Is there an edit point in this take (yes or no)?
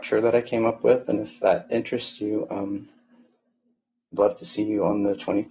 no